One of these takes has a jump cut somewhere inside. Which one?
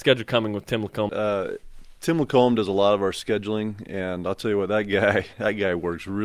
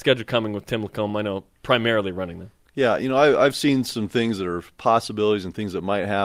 first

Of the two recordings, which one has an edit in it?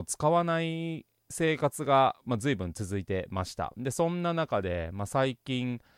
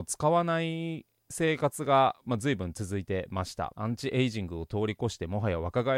second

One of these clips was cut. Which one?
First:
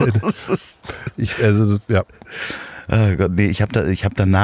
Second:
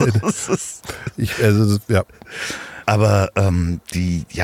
second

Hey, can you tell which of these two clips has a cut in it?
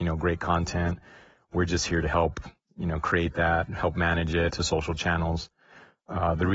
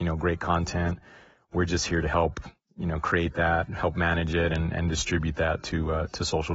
first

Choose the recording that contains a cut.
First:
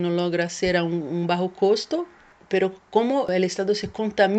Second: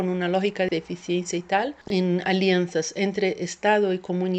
second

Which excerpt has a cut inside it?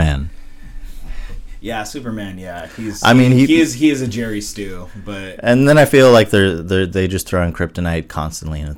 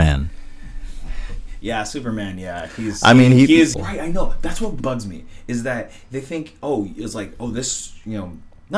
second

